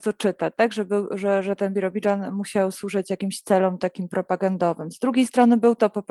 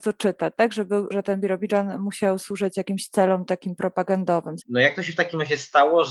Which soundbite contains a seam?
second; 2 cuts; at 1.1 s, 4.6 s

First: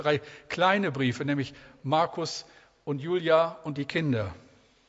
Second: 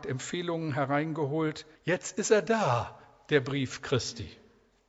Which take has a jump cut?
second; 1 cut; at 1.7 s

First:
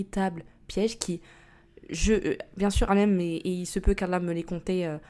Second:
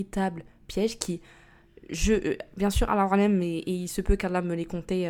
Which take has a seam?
first; 1 cut; at 2.9 s

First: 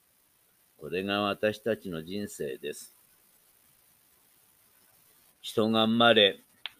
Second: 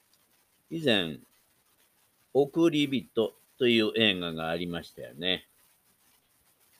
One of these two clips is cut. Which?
first; 1 cut; at 5.3 s

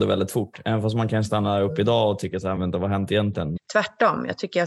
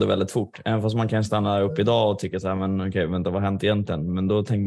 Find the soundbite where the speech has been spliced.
first; 2 cuts; at 2.6 s, 3.6 s

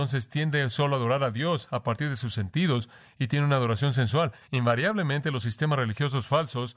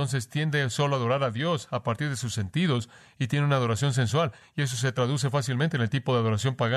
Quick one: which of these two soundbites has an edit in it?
first; 1 cut; at 4.5 s

